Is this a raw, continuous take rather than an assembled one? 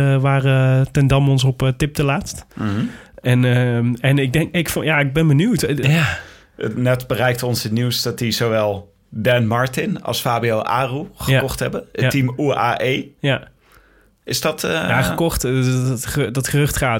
no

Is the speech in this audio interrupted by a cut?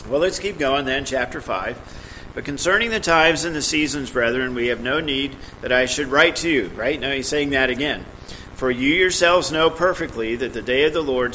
no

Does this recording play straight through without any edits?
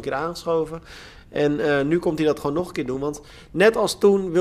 yes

